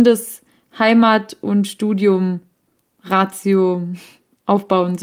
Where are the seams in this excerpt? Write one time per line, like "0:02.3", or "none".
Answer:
none